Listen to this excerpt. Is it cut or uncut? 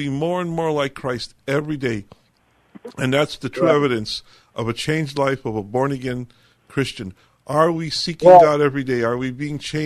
uncut